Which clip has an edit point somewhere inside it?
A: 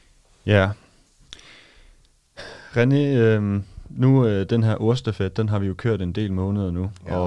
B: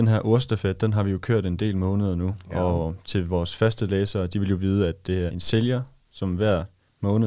B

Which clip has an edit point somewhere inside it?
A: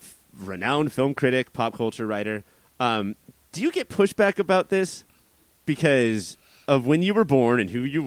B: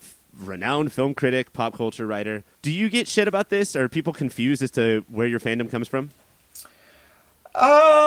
B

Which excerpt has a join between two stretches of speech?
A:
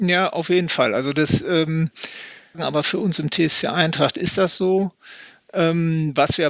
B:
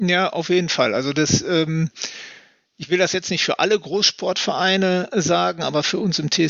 A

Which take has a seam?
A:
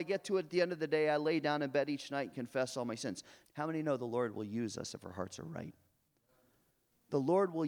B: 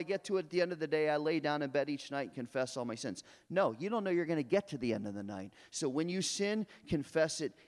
A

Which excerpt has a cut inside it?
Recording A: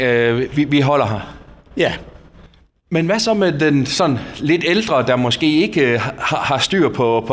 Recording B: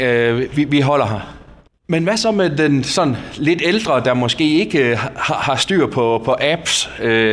B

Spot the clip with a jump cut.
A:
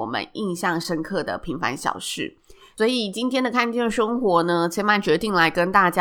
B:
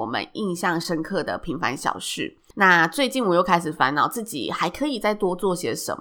B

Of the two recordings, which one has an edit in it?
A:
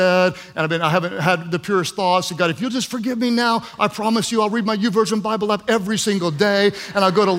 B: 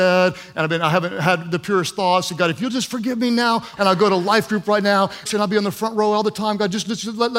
B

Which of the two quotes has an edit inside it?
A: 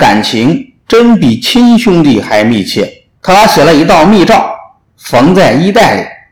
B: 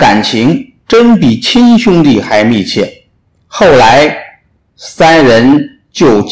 A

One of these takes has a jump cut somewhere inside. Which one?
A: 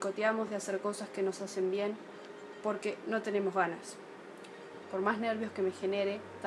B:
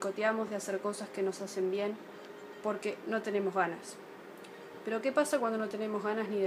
A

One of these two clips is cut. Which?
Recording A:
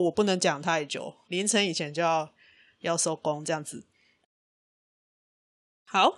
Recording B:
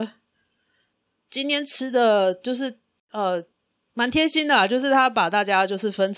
A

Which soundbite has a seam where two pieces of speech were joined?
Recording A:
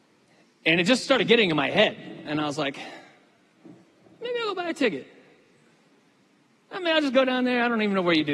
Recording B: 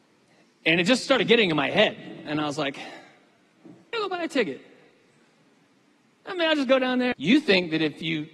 B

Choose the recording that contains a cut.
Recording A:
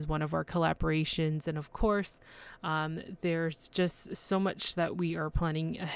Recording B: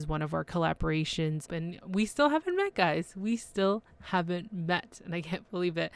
B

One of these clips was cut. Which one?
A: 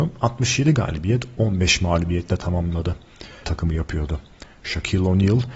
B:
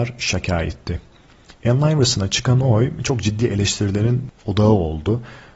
A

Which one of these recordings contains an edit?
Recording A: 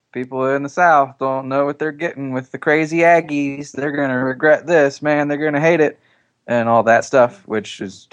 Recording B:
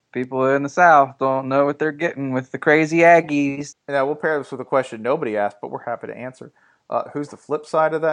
B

